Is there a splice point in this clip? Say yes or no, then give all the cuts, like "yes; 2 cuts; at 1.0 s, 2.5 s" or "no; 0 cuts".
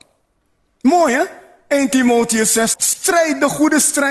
yes; 1 cut; at 2.7 s